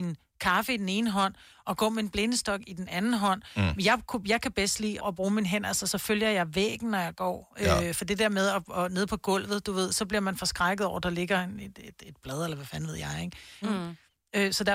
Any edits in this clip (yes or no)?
yes